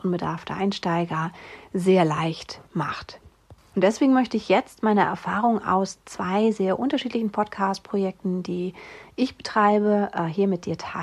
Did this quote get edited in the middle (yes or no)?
yes